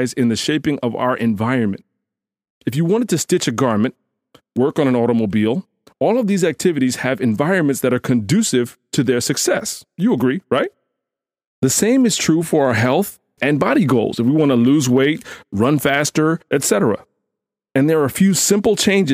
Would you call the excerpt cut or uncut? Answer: cut